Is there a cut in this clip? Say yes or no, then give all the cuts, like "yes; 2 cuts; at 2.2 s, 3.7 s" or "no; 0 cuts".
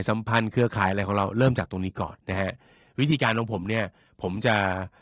yes; 1 cut; at 2.1 s